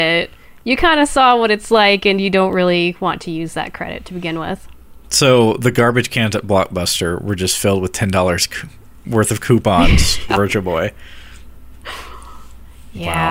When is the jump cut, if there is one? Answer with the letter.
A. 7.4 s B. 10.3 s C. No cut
B